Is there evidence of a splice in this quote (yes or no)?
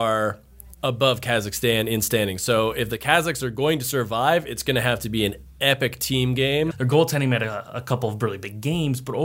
yes